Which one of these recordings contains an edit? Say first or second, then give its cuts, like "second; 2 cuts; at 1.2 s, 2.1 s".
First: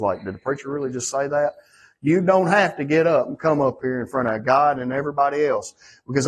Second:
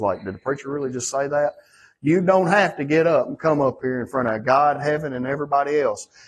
first; 1 cut; at 4.8 s